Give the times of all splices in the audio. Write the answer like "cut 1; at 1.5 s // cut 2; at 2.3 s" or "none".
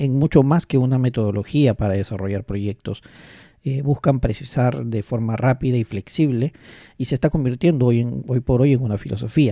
none